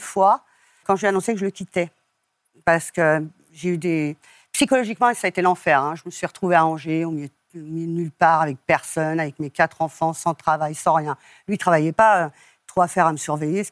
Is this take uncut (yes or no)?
yes